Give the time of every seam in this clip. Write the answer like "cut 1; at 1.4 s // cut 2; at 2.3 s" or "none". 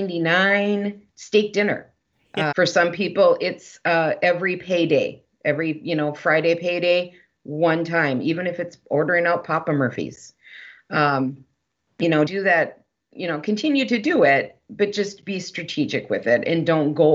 cut 1; at 2.5 s // cut 2; at 12.3 s